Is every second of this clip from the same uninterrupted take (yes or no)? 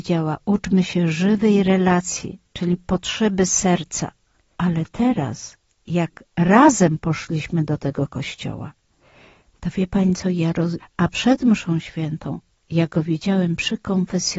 no